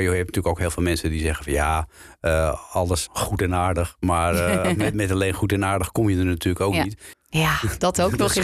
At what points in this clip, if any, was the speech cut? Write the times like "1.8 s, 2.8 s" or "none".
3.1 s, 7.1 s